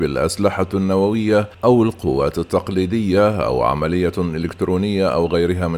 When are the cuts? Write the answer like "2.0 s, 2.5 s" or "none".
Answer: 1.5 s